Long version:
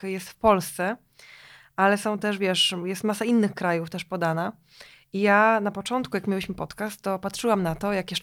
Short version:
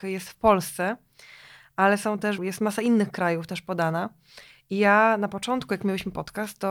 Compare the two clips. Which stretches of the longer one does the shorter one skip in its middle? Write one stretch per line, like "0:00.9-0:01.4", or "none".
0:02.4-0:02.8